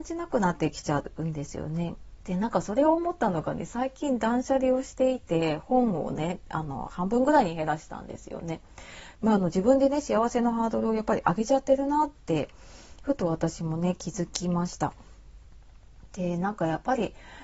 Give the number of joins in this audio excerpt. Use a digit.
2